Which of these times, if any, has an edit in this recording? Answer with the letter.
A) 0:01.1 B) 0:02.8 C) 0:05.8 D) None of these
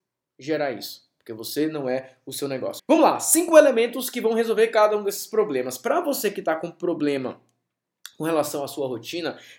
B